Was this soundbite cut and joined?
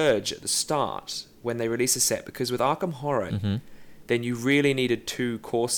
yes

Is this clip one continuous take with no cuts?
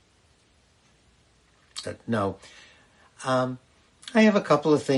no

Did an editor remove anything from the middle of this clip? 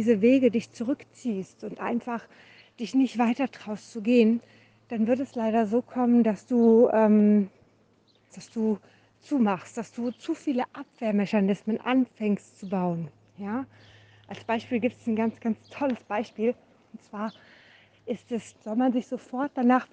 yes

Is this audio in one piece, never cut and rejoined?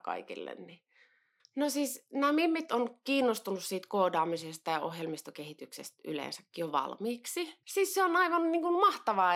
no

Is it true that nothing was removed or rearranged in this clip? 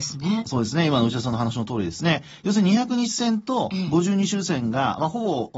yes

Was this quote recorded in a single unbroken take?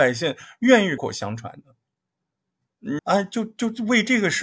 no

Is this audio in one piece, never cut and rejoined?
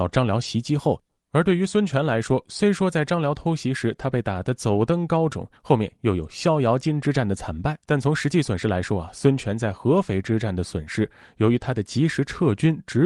no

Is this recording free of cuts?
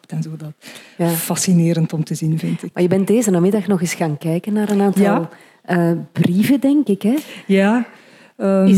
yes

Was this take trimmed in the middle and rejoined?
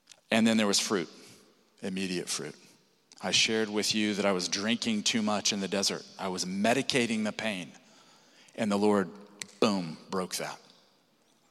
no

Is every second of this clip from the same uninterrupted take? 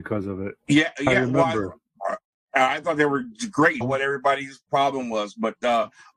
no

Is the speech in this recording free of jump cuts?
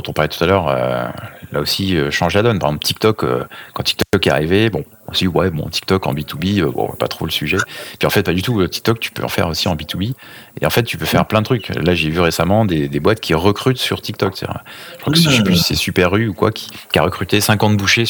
yes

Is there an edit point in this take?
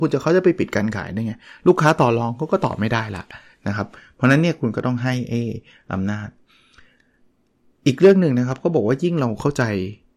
no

